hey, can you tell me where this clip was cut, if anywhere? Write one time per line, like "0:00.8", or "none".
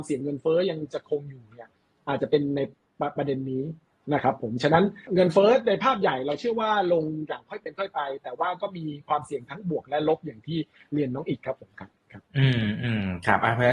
0:05.1
0:12.3